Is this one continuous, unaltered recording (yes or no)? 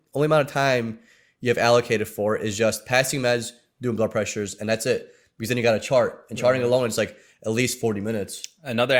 yes